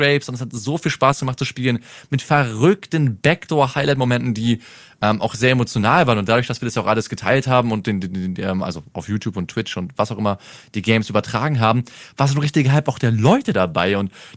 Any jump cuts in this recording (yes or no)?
no